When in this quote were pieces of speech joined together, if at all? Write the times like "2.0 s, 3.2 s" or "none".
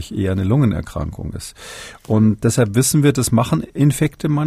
2.4 s